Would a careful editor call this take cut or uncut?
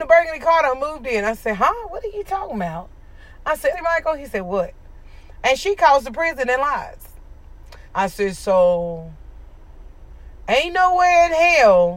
cut